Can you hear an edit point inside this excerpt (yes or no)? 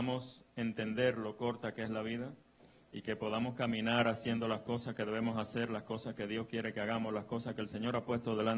no